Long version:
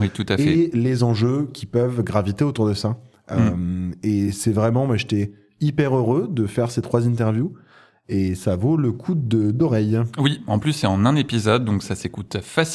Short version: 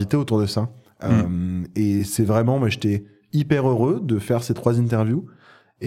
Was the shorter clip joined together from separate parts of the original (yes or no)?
no